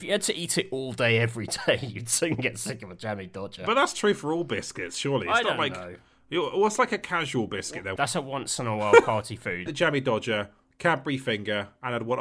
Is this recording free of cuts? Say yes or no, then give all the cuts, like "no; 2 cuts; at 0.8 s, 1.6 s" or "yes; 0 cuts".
no; 2 cuts; at 8.0 s, 9.7 s